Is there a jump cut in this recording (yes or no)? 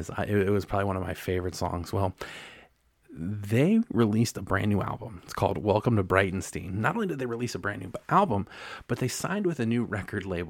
yes